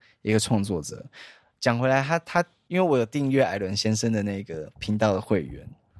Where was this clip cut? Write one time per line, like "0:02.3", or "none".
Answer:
0:02.7